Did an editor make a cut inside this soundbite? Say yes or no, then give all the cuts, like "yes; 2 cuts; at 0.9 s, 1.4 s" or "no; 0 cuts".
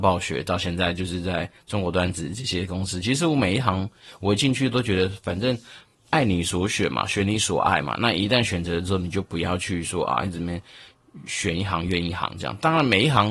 no; 0 cuts